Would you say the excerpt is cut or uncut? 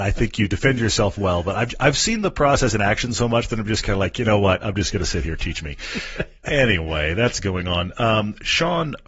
uncut